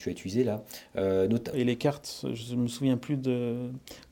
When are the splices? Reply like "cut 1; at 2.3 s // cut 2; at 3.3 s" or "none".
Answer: cut 1; at 1.5 s